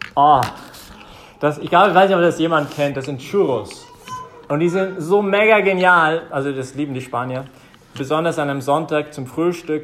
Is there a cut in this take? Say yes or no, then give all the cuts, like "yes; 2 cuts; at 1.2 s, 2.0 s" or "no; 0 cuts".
no; 0 cuts